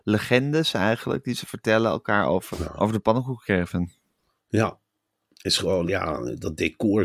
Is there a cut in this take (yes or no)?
yes